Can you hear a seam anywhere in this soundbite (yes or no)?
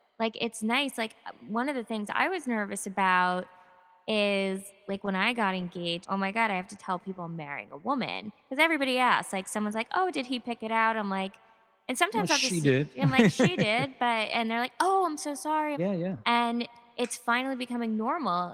yes